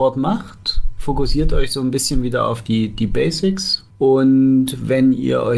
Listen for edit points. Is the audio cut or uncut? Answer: uncut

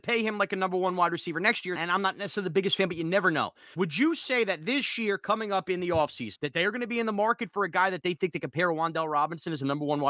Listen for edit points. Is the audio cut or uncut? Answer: cut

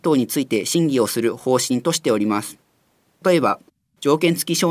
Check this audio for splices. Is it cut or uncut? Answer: cut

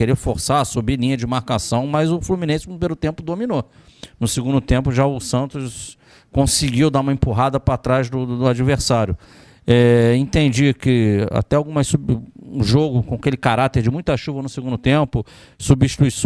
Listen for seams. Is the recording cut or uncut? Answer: uncut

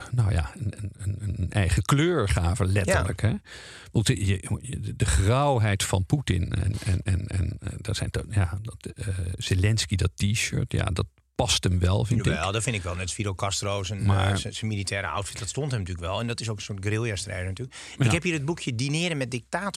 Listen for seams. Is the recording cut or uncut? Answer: uncut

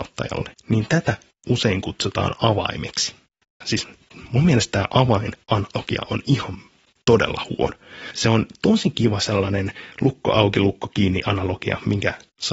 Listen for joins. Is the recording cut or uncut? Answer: uncut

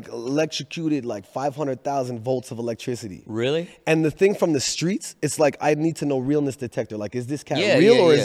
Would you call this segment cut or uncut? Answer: uncut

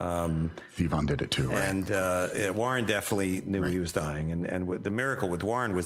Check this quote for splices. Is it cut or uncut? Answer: uncut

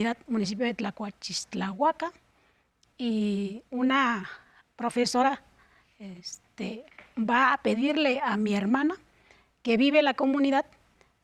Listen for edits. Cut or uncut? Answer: uncut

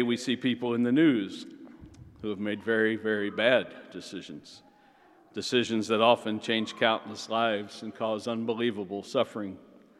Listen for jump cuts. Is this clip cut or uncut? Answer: uncut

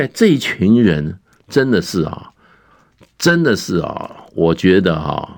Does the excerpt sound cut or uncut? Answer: uncut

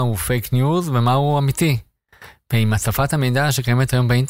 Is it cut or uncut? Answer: uncut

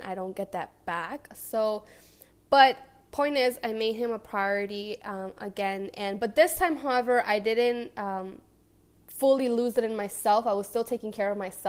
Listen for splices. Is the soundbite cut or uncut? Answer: uncut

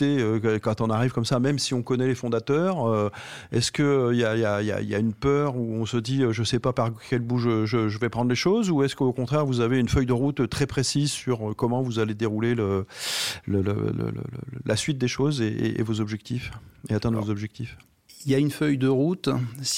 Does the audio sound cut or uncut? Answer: uncut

